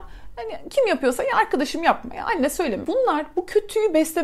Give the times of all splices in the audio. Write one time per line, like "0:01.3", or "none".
0:02.8